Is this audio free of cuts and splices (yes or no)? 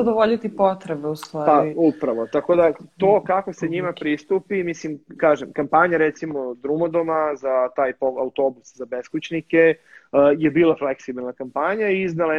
yes